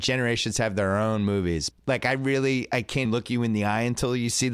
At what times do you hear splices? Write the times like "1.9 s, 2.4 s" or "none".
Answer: 1.7 s, 3.0 s